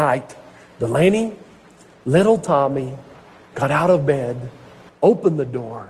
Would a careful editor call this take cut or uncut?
cut